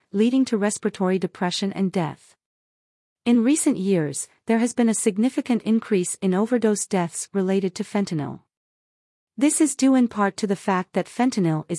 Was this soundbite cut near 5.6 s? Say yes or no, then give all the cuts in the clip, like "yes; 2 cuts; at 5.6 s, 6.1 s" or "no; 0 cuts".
no; 1 cut; at 3.1 s